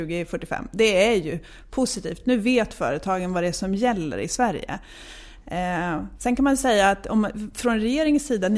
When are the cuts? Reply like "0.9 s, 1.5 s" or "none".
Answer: none